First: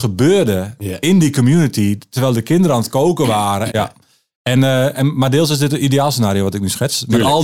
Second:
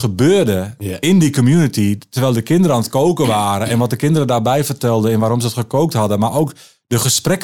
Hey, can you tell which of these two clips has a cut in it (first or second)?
first